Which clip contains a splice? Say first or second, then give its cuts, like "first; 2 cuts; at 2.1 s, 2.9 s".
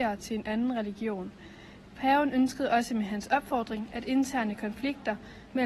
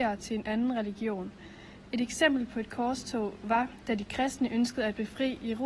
first; 1 cut; at 1.9 s